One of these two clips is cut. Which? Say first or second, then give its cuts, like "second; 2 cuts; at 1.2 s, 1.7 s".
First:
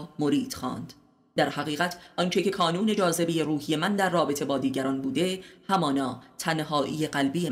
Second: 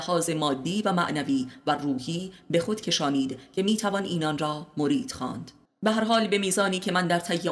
second; 1 cut; at 5.7 s